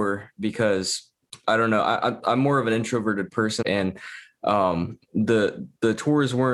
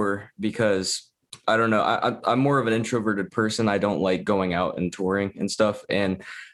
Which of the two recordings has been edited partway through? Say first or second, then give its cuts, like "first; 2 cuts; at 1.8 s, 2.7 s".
first; 1 cut; at 3.6 s